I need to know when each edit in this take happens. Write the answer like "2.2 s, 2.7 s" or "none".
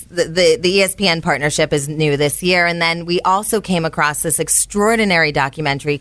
none